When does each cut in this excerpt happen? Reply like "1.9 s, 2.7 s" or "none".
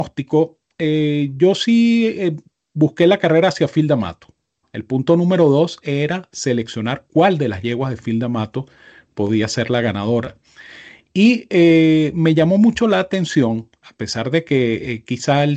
4.6 s